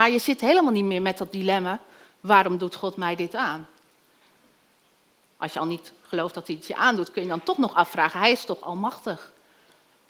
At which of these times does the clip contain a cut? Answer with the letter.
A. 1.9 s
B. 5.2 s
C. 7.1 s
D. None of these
B